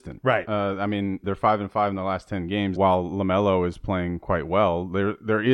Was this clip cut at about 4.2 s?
no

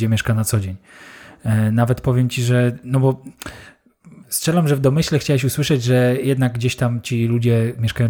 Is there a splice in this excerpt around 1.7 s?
no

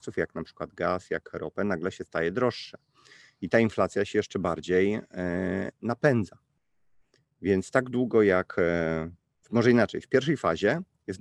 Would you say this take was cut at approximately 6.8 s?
no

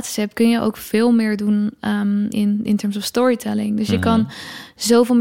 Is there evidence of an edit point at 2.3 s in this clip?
yes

